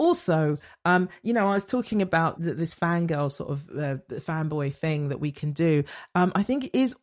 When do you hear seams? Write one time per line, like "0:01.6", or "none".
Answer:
0:02.4